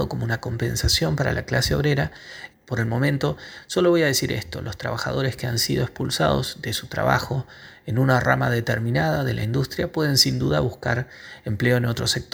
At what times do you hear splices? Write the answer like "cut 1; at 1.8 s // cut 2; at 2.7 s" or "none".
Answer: cut 1; at 2.5 s

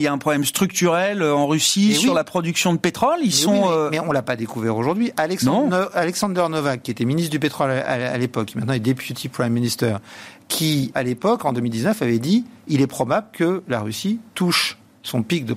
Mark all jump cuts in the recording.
cut 1; at 10.9 s

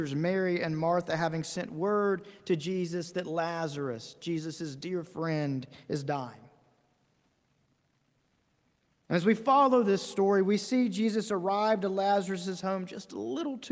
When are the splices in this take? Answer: none

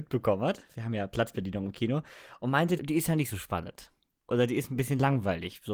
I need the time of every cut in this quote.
cut 1; at 2.8 s

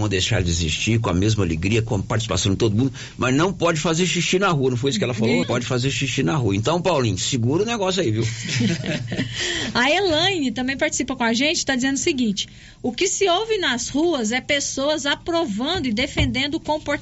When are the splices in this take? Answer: cut 1; at 5.4 s

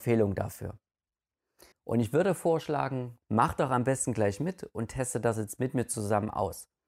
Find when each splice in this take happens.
cut 1; at 1.7 s // cut 2; at 3.2 s

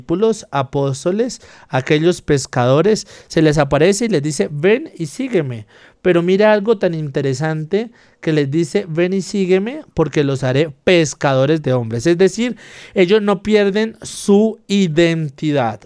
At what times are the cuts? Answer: none

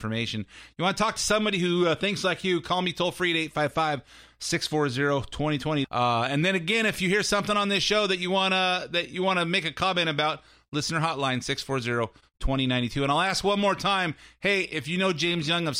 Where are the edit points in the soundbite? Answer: cut 1; at 5.8 s

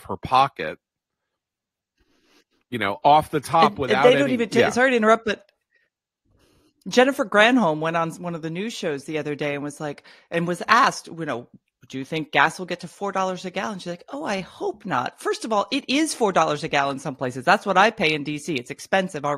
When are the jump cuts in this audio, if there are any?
none

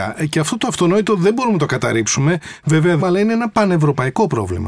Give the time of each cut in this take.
cut 1; at 3.0 s

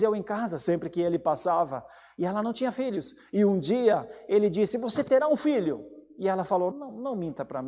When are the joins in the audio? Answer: cut 1; at 6.7 s

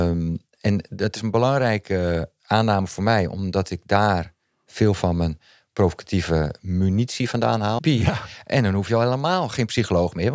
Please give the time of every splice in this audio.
cut 1; at 7.8 s

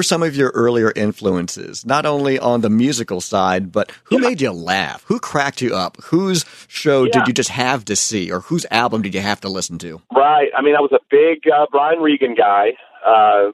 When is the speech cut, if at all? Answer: cut 1; at 10.0 s

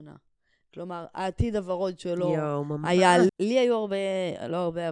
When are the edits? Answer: cut 1; at 3.3 s

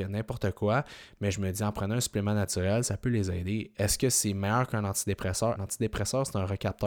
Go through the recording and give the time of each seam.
cut 1; at 5.6 s

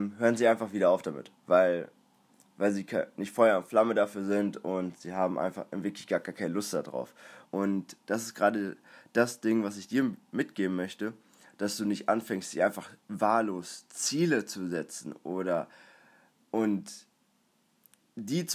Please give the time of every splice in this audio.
cut 1; at 7.5 s

